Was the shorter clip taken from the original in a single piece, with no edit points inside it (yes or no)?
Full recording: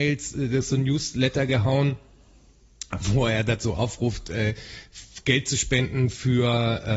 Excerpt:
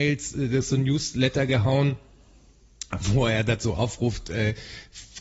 yes